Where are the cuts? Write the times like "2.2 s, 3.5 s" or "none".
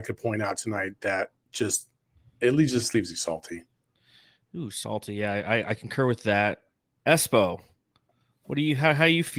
none